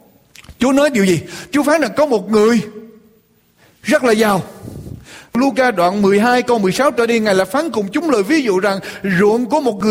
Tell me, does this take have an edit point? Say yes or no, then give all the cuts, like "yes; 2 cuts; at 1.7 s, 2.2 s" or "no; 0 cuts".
no; 0 cuts